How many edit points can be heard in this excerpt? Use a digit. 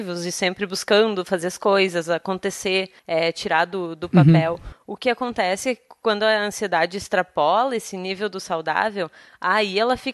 1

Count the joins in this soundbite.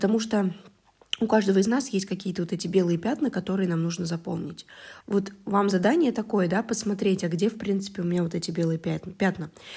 1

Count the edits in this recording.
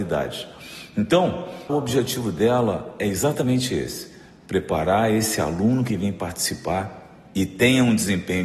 1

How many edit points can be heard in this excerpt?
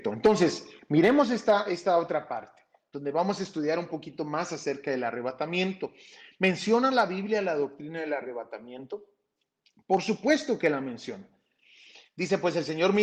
1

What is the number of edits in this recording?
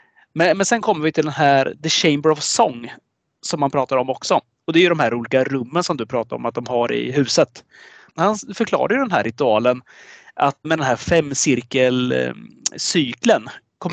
2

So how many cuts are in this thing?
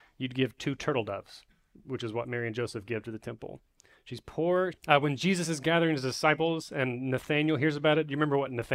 1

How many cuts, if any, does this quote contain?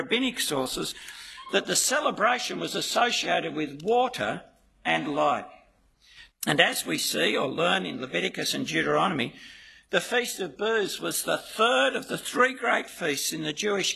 1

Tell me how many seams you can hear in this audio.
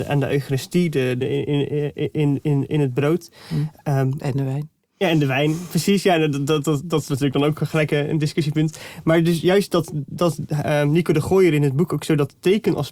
1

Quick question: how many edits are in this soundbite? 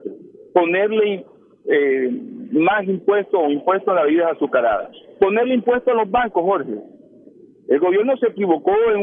0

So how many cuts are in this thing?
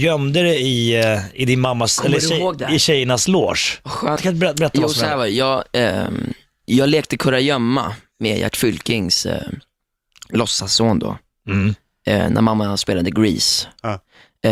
1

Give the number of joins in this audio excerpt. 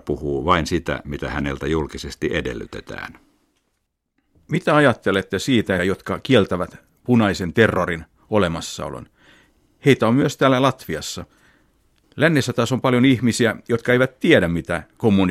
1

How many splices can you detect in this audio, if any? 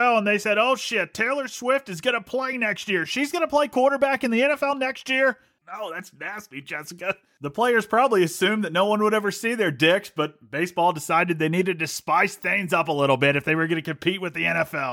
1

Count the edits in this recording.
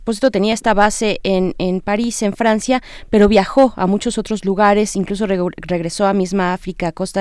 0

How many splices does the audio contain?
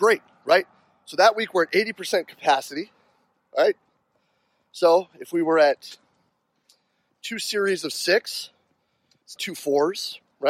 1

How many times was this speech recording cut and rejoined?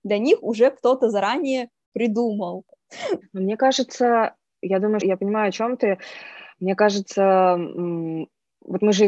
2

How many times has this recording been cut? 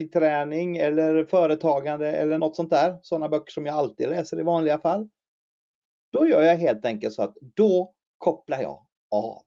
1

